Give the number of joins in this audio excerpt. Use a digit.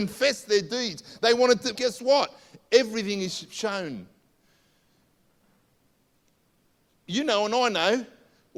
1